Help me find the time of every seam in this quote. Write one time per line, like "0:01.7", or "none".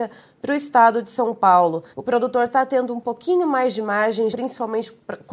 0:01.9
0:04.3